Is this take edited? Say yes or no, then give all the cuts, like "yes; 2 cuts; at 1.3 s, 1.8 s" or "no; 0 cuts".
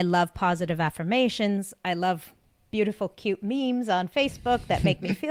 no; 0 cuts